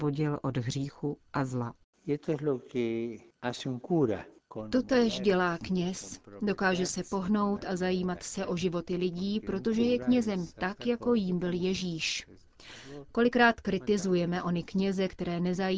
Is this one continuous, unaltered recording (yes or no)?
yes